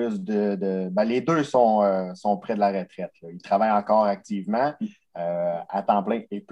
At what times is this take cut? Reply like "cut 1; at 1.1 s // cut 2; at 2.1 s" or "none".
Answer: none